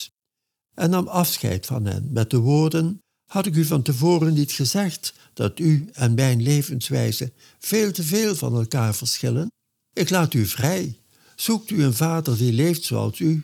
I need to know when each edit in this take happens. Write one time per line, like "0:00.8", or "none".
none